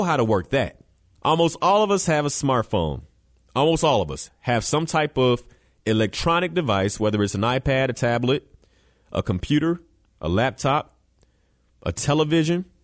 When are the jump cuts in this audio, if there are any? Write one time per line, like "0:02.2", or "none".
0:01.1